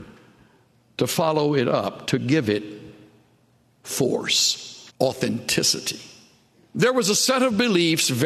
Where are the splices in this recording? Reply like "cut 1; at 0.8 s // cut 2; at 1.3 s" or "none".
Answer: cut 1; at 2.0 s // cut 2; at 4.9 s // cut 3; at 6.7 s